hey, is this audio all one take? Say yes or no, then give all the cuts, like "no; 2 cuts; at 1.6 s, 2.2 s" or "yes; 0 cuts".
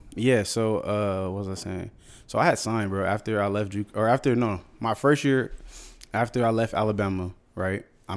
yes; 0 cuts